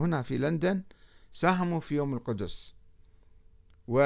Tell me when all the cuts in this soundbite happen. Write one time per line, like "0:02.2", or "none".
none